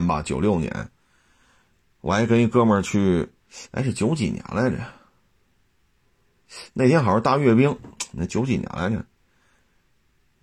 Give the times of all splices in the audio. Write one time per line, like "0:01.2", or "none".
none

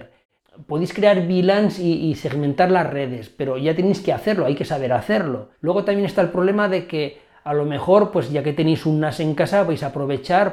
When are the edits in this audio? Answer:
0:05.5

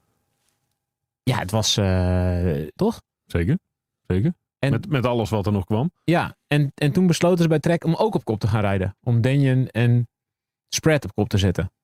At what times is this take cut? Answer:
0:02.8

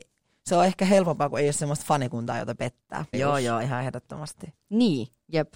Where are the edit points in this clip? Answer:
0:03.1
0:04.6

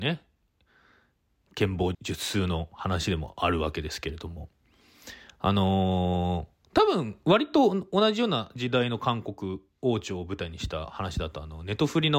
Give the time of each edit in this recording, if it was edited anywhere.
0:01.9

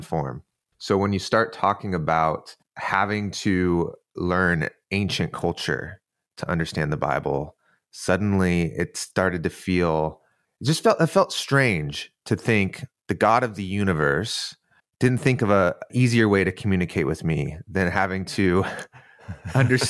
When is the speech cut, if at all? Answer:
none

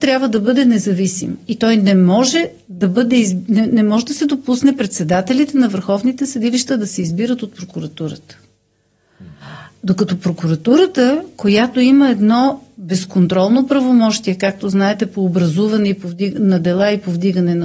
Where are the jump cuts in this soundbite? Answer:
none

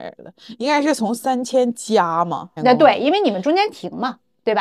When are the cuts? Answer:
0:02.6

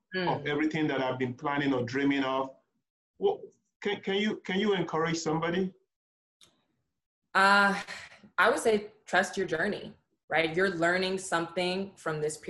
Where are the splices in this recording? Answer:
none

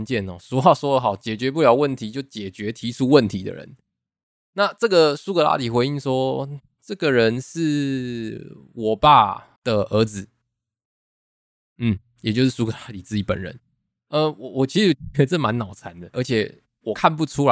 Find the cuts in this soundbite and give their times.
0:09.6

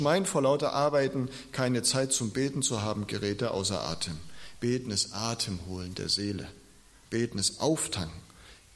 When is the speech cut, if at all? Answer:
none

